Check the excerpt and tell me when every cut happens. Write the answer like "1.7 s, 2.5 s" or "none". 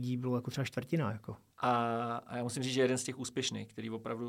1.5 s